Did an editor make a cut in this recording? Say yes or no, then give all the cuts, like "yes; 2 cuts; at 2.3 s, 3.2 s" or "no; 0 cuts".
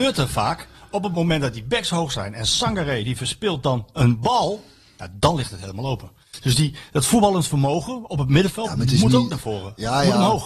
no; 0 cuts